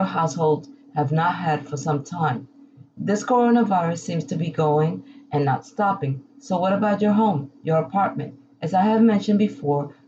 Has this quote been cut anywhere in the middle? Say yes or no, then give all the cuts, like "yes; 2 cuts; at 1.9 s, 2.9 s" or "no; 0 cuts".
no; 0 cuts